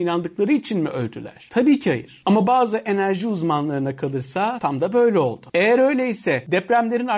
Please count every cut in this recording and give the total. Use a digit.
0